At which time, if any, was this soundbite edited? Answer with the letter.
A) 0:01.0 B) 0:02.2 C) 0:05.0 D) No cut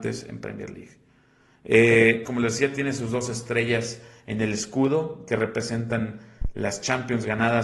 B